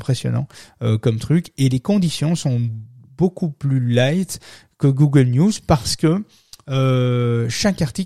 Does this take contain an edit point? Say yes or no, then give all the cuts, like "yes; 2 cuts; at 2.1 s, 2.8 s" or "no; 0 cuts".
no; 0 cuts